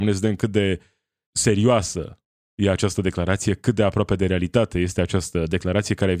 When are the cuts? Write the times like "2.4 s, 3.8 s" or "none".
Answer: 1.3 s